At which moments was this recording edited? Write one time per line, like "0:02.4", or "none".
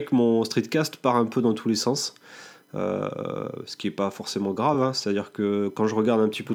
none